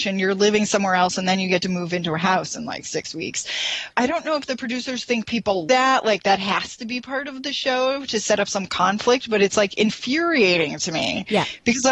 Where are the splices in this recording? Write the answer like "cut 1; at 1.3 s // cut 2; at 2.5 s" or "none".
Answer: cut 1; at 5.7 s